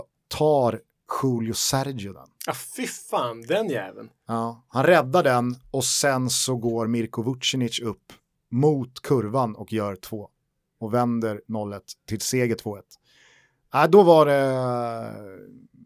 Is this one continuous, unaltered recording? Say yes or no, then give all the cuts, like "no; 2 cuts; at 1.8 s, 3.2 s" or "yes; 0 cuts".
no; 1 cut; at 13.6 s